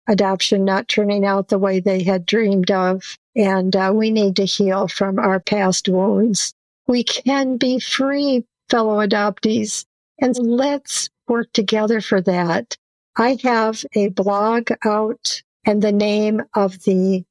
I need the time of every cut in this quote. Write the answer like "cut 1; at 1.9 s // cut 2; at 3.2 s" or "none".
cut 1; at 10.3 s // cut 2; at 15.5 s